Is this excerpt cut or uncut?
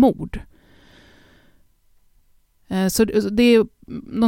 uncut